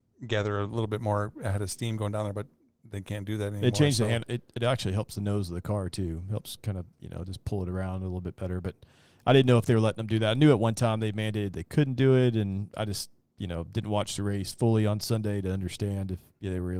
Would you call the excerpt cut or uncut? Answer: uncut